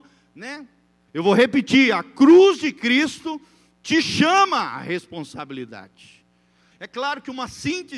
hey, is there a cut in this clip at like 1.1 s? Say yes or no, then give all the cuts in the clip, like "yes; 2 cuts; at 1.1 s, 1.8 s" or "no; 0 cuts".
yes; 2 cuts; at 1.1 s, 6.7 s